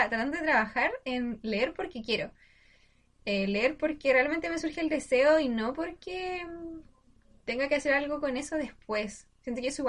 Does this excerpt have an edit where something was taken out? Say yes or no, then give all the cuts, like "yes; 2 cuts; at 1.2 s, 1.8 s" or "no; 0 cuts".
no; 0 cuts